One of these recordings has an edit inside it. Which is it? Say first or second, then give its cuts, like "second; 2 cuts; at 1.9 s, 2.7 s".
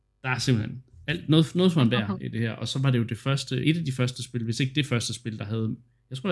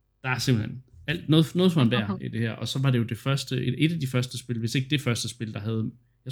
first; 1 cut; at 3.6 s